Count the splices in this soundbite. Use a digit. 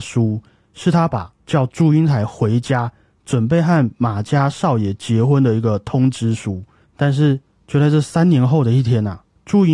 2